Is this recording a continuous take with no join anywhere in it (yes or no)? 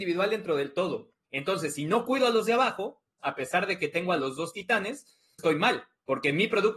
no